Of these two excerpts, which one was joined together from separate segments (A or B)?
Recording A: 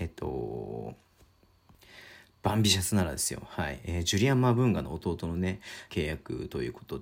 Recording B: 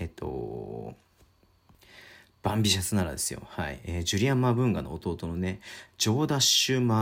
A